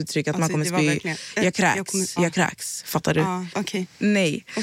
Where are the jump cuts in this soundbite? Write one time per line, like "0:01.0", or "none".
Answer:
0:02.2
0:03.5